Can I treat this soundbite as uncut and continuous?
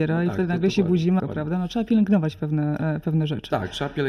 no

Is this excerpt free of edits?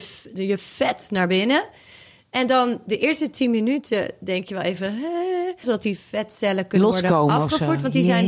no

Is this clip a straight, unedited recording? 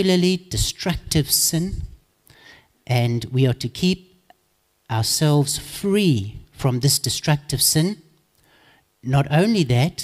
yes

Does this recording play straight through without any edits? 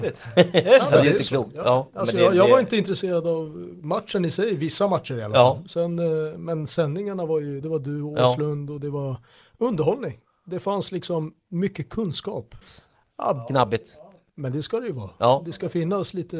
no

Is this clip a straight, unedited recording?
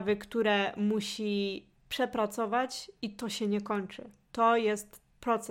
yes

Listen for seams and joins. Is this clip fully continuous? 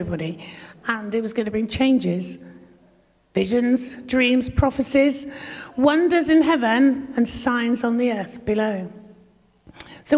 yes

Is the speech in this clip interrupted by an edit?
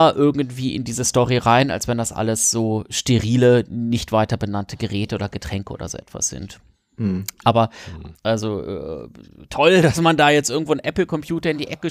yes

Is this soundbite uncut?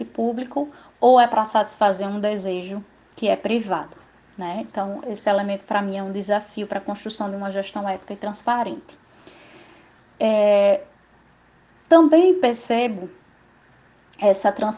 yes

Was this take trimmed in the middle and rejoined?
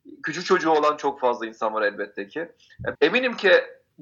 yes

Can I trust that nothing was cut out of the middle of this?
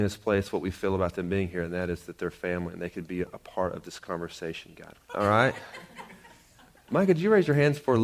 no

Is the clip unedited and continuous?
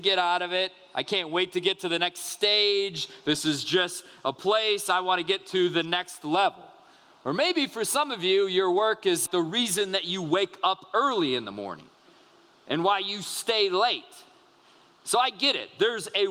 no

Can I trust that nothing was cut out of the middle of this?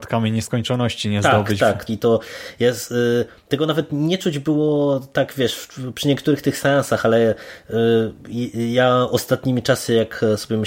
no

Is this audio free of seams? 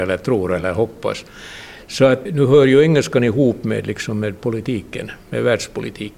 no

